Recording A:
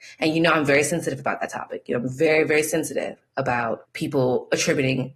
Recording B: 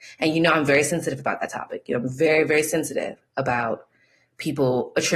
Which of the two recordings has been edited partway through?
A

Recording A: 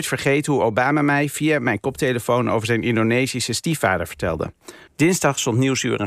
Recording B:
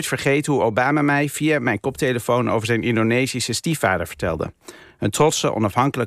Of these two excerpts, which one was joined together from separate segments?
A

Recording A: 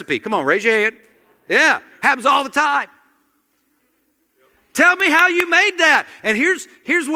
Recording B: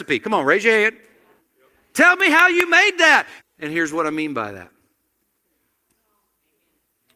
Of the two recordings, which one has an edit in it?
B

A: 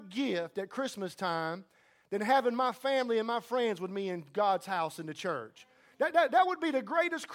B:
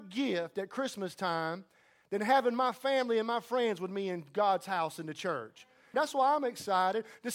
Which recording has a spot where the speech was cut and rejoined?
B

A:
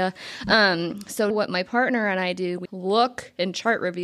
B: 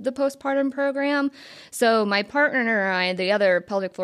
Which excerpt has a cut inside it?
A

